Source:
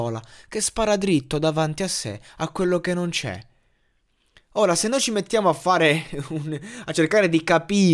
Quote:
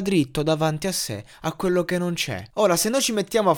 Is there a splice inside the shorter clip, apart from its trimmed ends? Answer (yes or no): yes